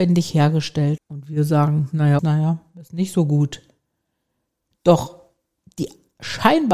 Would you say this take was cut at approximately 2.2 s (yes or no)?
yes